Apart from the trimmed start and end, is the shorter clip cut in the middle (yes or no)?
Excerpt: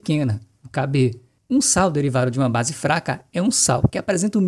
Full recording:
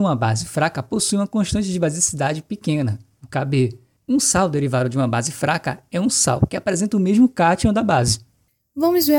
no